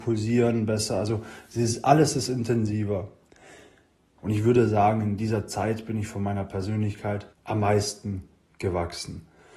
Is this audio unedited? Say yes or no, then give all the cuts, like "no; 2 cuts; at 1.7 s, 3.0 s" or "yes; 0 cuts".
no; 2 cuts; at 4.2 s, 7.3 s